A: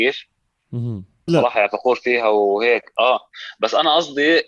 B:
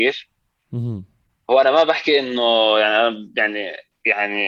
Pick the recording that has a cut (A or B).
A